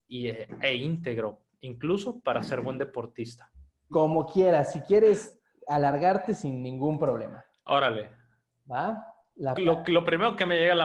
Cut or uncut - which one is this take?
cut